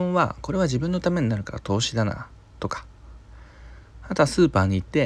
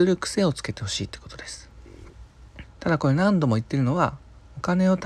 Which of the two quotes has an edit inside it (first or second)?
second